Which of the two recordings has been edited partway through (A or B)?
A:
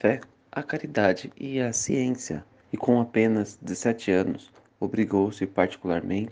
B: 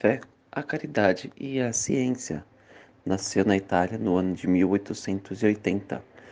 A